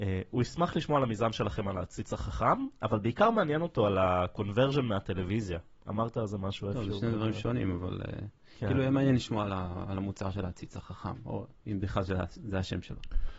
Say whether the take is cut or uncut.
uncut